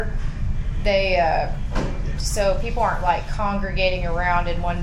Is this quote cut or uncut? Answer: cut